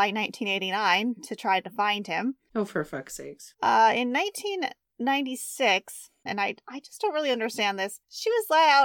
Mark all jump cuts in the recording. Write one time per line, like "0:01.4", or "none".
0:02.5
0:03.5
0:06.3